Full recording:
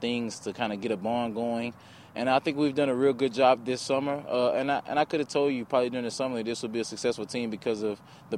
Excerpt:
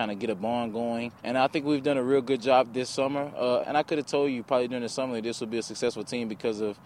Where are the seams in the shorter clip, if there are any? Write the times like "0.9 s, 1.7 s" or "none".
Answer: 1.2 s, 3.6 s